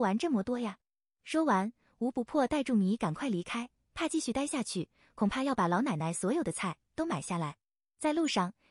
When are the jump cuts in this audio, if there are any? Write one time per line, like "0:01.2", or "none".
none